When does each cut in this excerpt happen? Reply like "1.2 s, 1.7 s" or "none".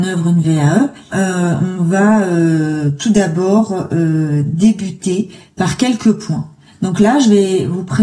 1.1 s